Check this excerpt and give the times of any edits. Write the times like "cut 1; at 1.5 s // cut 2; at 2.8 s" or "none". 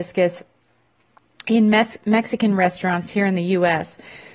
none